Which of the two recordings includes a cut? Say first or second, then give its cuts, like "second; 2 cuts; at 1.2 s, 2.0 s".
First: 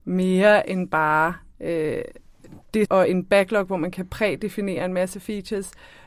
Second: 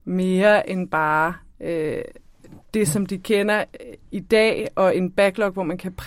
first; 1 cut; at 2.9 s